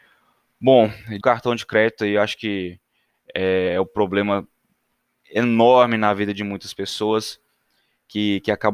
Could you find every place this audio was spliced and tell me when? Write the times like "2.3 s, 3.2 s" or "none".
1.2 s